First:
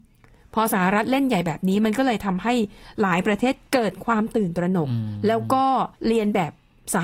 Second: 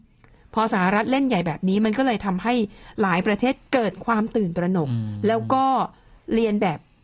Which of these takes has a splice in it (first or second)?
first